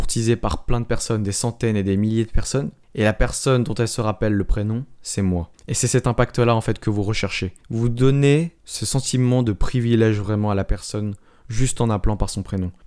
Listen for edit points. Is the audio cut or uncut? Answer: uncut